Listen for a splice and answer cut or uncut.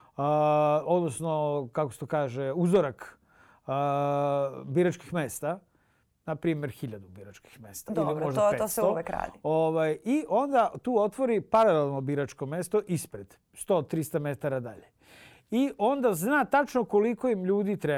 uncut